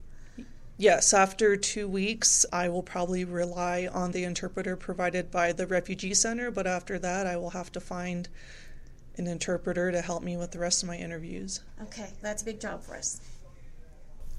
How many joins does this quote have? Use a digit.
2